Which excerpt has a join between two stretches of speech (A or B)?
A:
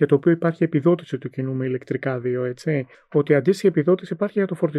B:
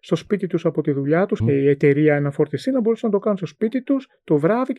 B